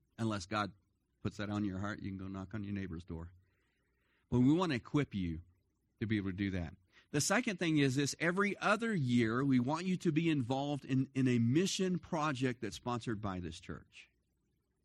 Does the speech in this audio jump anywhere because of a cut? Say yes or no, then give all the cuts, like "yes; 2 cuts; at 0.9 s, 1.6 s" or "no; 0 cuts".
no; 0 cuts